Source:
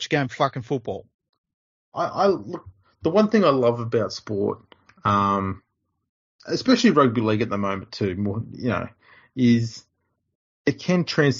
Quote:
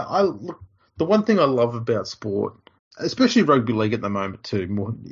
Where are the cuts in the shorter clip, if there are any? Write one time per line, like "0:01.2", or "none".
0:02.8